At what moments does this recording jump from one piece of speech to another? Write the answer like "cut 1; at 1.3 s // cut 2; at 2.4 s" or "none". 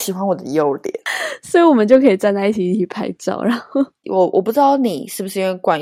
cut 1; at 4.0 s